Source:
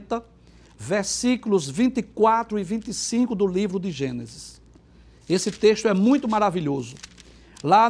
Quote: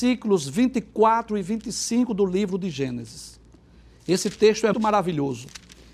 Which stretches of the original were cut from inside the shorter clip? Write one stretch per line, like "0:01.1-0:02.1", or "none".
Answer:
0:05.9-0:06.2